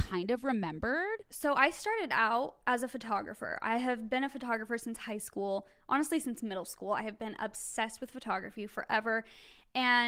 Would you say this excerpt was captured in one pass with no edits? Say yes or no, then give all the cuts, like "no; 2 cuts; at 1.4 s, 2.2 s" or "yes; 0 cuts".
yes; 0 cuts